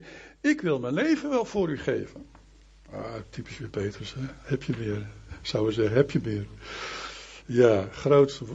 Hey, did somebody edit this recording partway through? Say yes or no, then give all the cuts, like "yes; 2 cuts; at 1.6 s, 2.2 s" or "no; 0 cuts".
no; 0 cuts